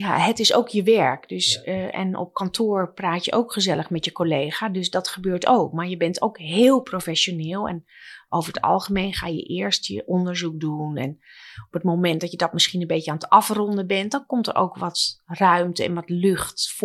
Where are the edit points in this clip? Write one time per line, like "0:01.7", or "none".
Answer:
none